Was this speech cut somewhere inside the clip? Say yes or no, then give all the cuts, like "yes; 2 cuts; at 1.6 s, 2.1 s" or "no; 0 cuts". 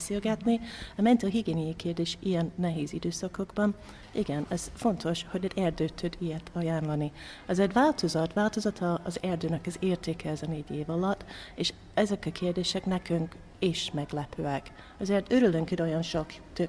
no; 0 cuts